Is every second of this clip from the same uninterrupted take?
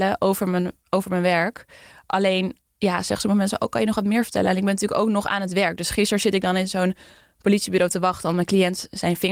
yes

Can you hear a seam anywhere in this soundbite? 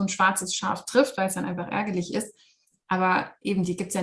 no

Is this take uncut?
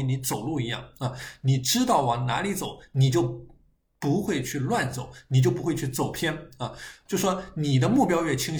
no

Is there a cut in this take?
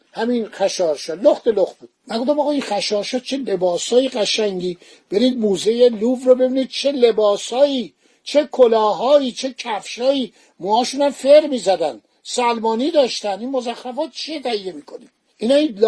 no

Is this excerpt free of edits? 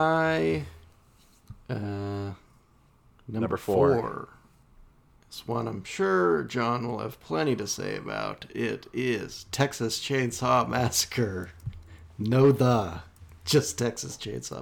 yes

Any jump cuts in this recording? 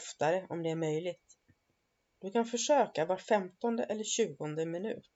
no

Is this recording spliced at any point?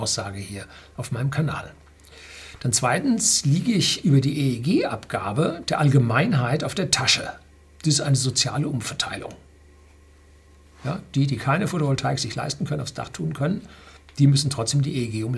no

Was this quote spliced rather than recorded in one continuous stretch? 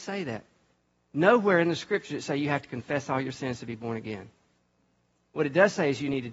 no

